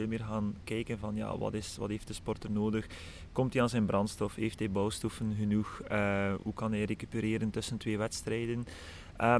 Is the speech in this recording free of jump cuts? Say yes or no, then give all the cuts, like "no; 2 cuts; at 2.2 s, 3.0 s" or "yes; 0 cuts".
yes; 0 cuts